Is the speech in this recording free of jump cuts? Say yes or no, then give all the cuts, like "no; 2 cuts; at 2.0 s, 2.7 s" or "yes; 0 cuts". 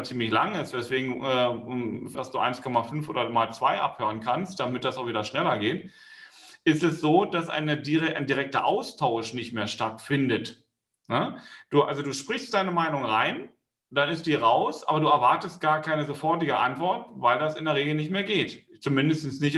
no; 1 cut; at 2.1 s